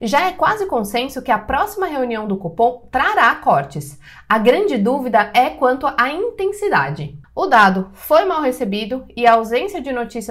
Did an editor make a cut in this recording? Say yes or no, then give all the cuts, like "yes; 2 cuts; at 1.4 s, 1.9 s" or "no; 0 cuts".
yes; 1 cut; at 7.2 s